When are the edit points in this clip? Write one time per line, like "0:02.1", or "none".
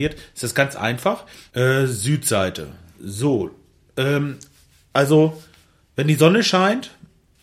0:01.5